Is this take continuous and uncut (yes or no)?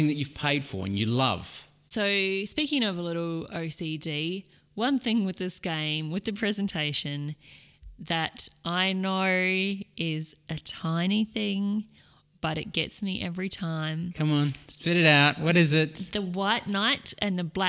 no